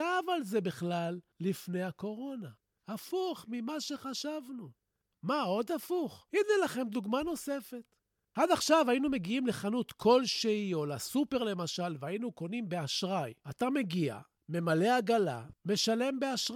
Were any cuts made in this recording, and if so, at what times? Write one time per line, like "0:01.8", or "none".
0:02.8